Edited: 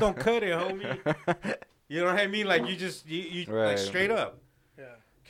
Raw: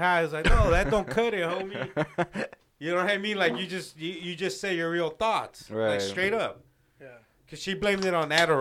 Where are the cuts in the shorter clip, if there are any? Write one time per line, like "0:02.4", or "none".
0:03.4